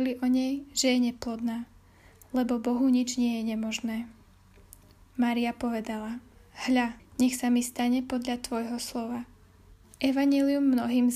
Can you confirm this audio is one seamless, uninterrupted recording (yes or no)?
no